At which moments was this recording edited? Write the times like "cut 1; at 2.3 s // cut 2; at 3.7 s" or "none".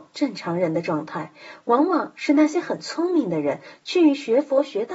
none

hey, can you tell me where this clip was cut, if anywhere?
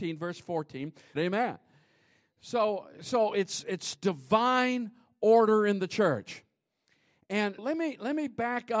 cut 1; at 1.2 s // cut 2; at 7.6 s

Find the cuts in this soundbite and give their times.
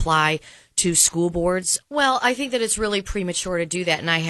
cut 1; at 1.8 s

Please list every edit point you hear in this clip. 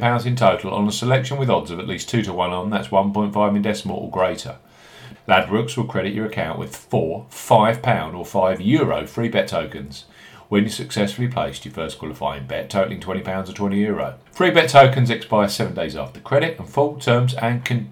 cut 1; at 5.1 s // cut 2; at 14.3 s

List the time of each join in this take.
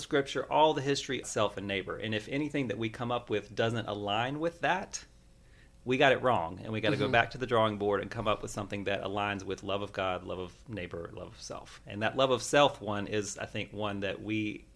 cut 1; at 1.2 s

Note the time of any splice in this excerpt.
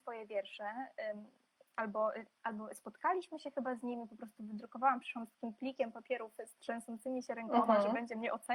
none

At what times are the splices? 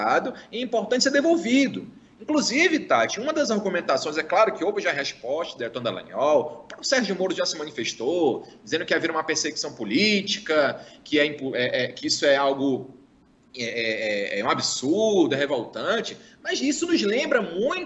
none

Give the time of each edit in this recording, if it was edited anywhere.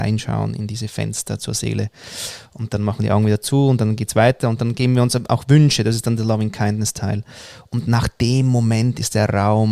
none

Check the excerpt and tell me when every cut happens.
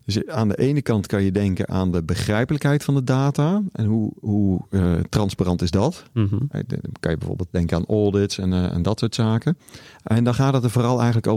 none

